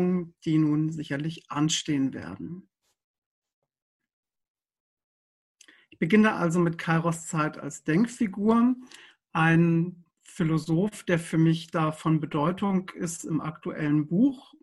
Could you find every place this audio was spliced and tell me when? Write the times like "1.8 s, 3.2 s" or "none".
none